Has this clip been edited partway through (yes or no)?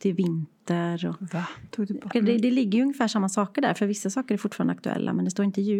yes